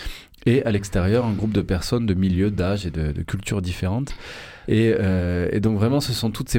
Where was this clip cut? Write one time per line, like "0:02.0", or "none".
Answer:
none

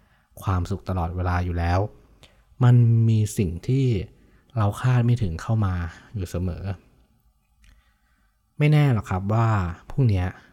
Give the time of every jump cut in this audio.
none

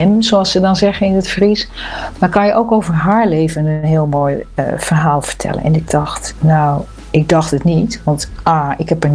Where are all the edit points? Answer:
none

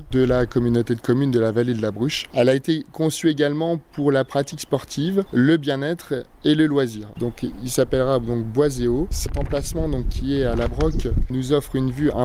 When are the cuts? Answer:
0:07.1

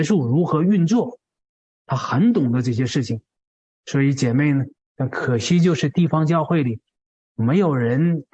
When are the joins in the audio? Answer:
0:04.8

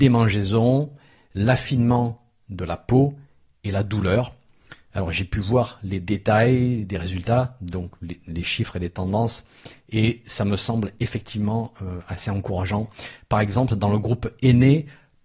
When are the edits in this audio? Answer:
none

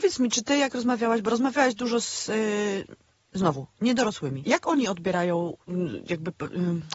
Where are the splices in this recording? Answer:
0:04.4

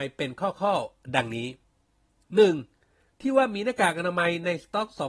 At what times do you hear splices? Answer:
0:03.2

